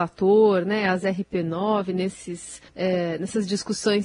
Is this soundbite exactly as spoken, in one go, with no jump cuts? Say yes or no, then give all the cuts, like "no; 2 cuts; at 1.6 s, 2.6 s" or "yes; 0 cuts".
no; 1 cut; at 2.7 s